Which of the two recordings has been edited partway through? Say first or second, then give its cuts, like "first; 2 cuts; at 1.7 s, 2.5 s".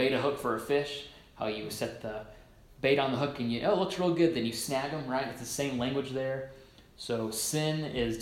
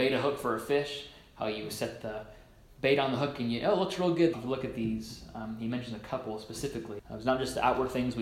second; 2 cuts; at 4.3 s, 7.0 s